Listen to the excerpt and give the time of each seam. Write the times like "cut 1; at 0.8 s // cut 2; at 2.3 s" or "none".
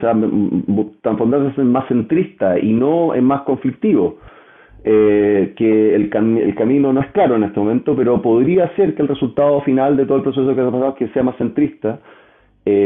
none